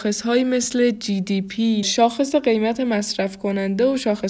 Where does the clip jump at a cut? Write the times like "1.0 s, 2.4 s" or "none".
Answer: 1.8 s